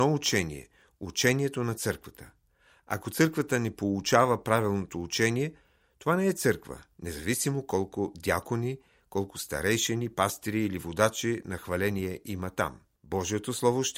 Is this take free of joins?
no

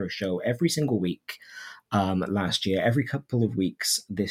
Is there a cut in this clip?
no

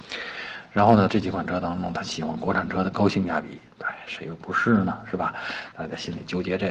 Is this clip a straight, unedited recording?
no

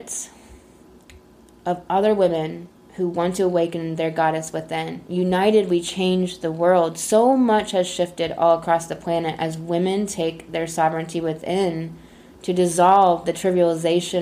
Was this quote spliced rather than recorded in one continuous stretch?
no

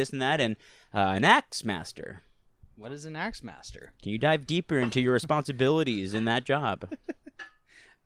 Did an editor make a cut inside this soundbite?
no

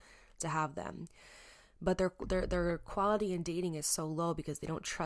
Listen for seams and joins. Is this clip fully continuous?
yes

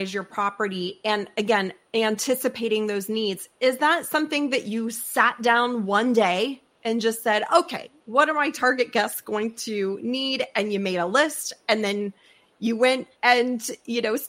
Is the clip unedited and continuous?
yes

